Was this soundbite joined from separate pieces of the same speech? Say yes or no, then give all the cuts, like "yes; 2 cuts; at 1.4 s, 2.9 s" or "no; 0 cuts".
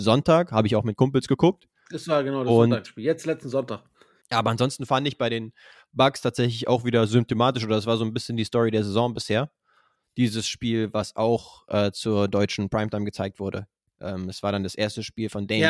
yes; 1 cut; at 4.2 s